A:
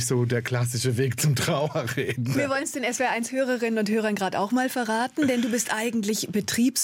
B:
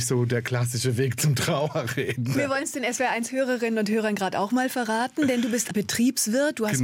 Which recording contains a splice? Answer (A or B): B